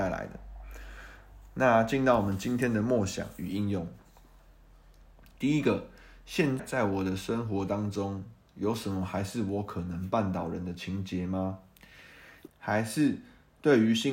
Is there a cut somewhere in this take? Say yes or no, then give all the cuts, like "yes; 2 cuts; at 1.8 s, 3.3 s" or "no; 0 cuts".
yes; 2 cuts; at 6.6 s, 12.5 s